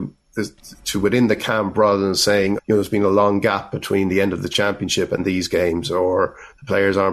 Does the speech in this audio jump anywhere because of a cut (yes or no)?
yes